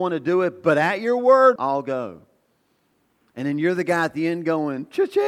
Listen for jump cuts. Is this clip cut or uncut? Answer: cut